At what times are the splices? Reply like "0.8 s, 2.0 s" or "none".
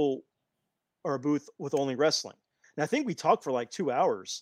2.6 s